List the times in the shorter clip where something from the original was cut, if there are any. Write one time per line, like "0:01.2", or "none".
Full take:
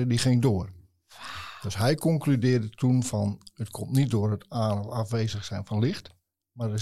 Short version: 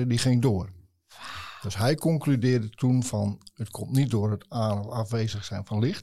none

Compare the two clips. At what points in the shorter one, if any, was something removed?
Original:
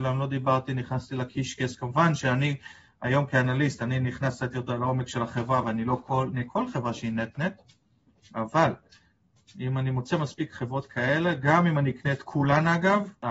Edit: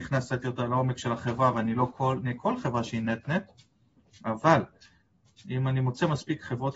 none

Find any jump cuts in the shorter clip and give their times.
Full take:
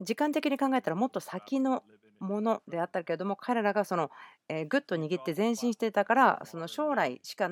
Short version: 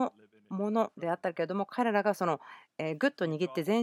none

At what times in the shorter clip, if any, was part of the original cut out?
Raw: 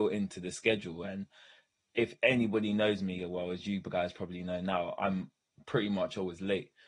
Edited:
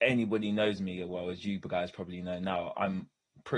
none

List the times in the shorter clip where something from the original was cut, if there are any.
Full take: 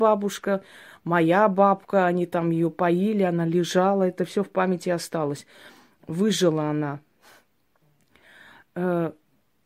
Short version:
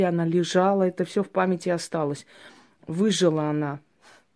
none

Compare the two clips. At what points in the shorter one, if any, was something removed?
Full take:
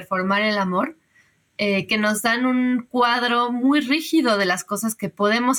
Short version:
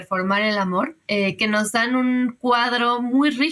0:01.0

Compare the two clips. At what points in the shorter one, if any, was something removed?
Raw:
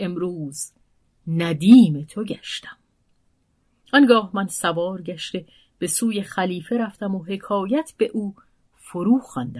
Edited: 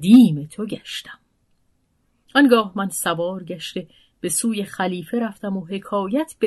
none

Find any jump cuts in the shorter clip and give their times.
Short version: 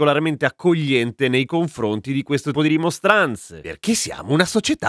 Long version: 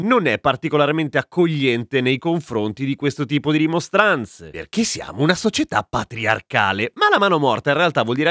0:02.5

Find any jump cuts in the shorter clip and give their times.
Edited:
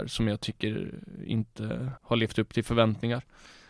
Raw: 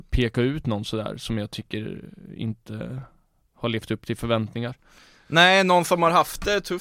0:02.0

